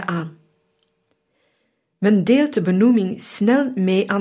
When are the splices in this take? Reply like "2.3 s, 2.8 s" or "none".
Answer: none